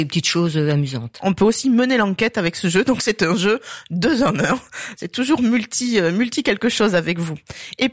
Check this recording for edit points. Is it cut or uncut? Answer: uncut